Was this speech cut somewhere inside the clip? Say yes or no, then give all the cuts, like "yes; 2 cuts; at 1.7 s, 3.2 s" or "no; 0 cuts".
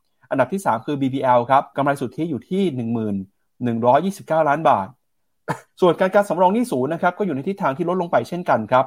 yes; 2 cuts; at 1.7 s, 5.7 s